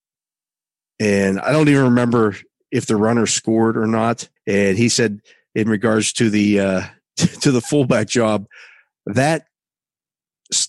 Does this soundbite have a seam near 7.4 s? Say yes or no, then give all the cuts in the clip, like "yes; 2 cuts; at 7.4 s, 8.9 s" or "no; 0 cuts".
no; 1 cut; at 4.4 s